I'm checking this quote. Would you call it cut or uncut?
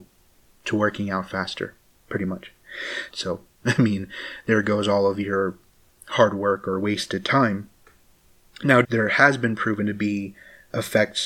cut